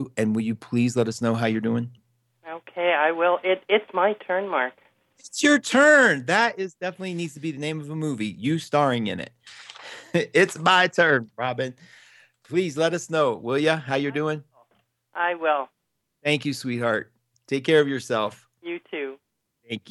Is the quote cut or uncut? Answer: uncut